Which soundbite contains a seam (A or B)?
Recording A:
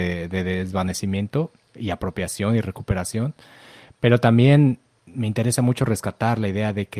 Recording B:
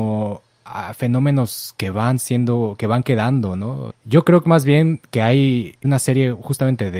B